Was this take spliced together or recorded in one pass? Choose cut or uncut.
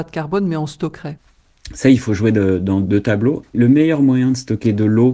cut